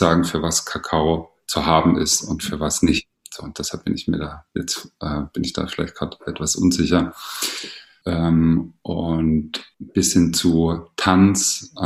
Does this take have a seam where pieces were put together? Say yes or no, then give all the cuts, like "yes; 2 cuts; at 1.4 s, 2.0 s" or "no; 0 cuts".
yes; 2 cuts; at 8.0 s, 9.7 s